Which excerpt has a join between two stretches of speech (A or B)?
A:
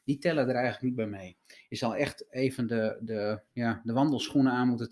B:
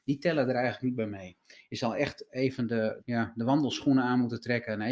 B